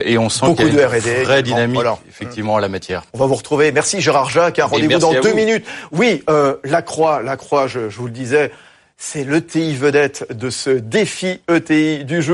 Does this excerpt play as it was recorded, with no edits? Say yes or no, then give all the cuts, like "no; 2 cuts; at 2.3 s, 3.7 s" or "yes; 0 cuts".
no; 1 cut; at 3.1 s